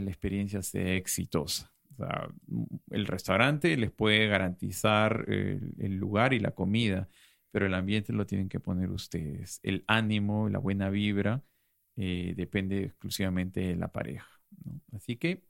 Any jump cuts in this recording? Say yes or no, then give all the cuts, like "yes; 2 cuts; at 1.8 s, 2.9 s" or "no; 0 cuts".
no; 0 cuts